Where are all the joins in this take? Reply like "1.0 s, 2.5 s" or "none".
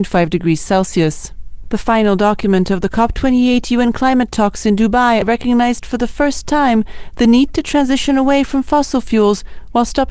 1.6 s, 5.2 s